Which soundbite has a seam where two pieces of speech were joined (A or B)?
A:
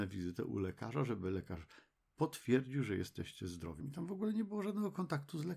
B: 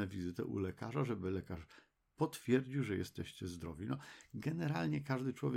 A